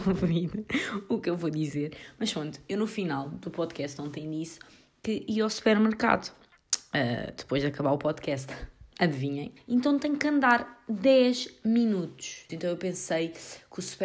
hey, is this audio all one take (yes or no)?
no